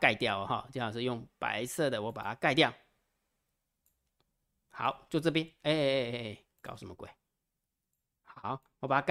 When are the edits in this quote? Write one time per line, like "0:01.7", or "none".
none

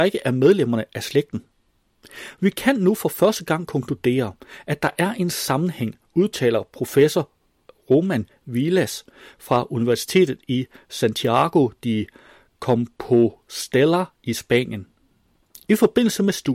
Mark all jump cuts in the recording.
none

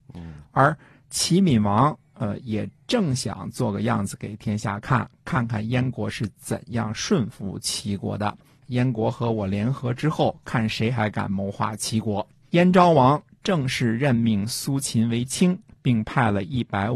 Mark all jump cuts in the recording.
0:08.6
0:12.5
0:15.7

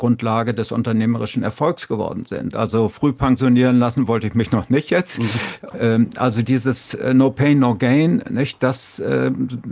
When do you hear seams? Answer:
0:02.5
0:05.7

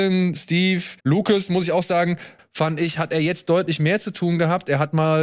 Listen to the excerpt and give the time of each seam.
0:01.0
0:02.4

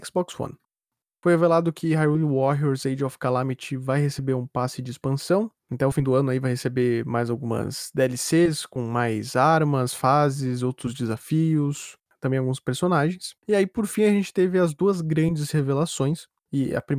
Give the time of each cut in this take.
0:13.4

